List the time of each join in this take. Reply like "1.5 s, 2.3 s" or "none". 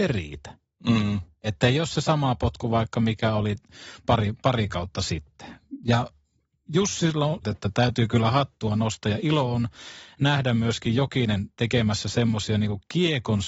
7.4 s